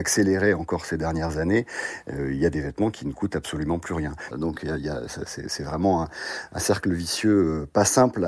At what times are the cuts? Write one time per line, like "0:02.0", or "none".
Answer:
0:04.3

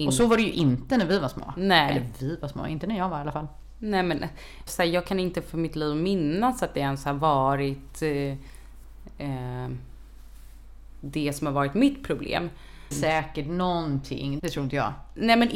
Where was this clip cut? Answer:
0:04.7
0:12.9
0:14.4

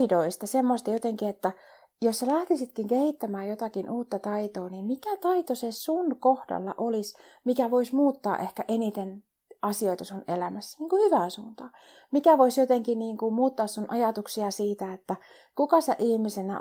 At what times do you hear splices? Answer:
none

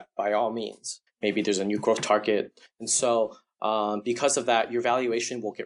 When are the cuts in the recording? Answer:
0:01.1
0:02.7

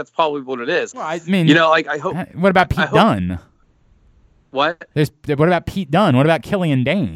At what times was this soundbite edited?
0:00.9

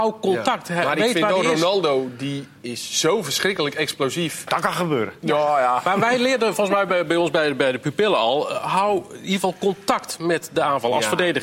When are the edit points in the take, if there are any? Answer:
0:04.5

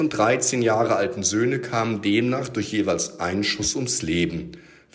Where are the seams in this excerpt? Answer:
none

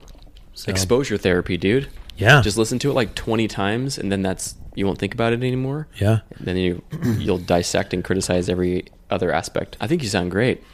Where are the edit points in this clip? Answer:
0:06.4
0:09.8

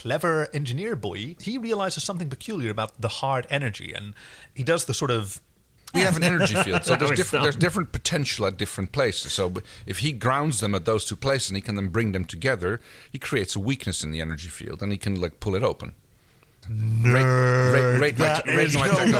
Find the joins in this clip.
0:04.9
0:05.9

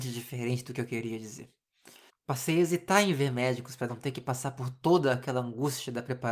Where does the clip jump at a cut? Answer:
0:02.1

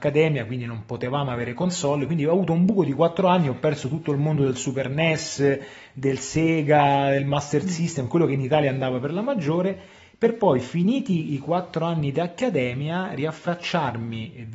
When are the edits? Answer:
none

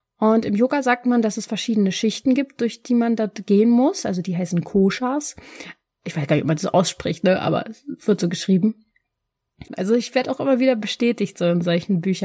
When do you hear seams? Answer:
0:09.7

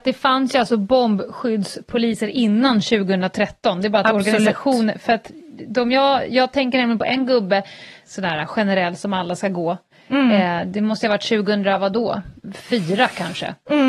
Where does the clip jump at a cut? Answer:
0:08.0

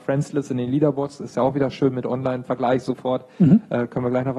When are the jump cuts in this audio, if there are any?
none

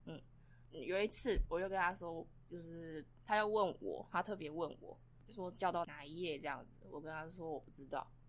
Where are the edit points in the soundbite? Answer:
none

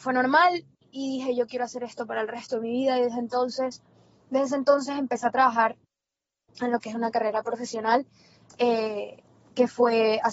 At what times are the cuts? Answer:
none

